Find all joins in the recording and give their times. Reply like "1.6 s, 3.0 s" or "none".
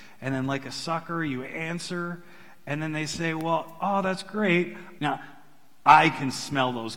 5.0 s